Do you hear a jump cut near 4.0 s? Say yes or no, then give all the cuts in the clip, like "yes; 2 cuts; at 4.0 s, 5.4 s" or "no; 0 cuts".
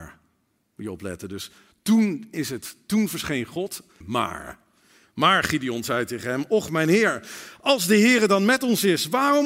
yes; 1 cut; at 4.0 s